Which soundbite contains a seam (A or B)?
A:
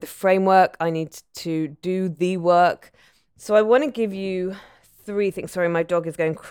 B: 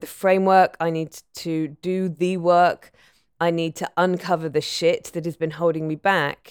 A